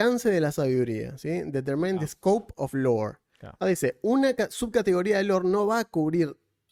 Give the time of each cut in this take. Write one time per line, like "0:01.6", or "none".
0:03.6

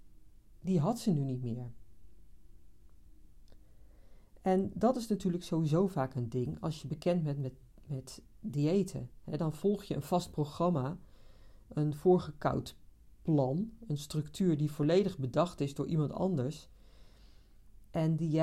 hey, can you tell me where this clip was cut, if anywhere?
none

